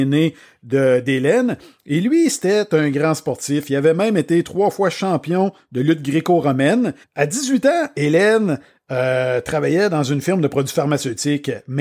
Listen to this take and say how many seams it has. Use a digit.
1